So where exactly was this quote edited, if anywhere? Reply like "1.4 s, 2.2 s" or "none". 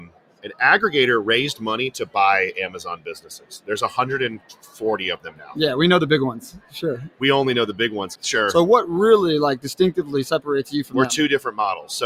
8.2 s